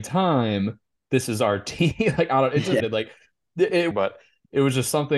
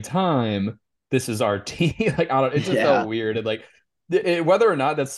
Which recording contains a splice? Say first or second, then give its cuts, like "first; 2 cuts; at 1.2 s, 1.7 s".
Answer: first; 2 cuts; at 2.8 s, 3.9 s